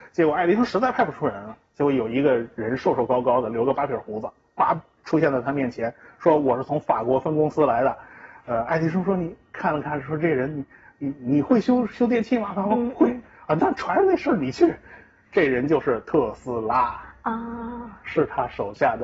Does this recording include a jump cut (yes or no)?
no